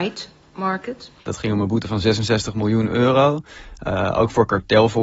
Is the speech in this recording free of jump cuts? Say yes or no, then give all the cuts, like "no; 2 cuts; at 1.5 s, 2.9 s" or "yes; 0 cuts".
no; 1 cut; at 1.2 s